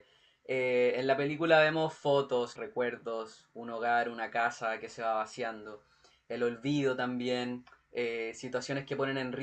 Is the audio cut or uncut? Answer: cut